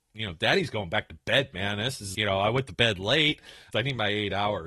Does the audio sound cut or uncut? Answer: cut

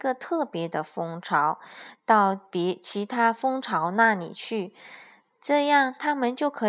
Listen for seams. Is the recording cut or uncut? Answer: uncut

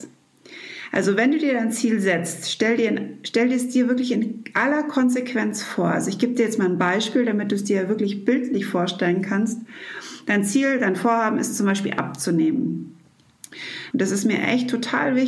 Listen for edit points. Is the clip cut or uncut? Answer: cut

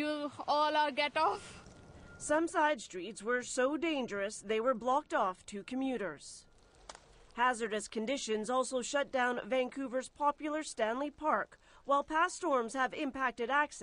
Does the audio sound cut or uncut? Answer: uncut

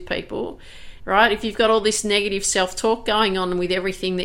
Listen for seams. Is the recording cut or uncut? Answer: cut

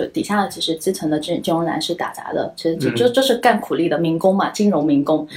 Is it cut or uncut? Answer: uncut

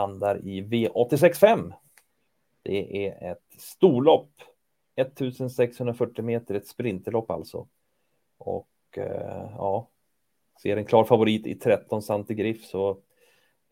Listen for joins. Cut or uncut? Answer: uncut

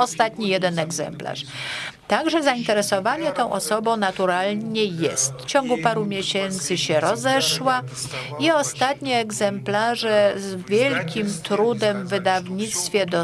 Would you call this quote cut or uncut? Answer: cut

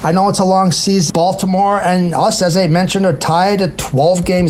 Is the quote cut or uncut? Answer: cut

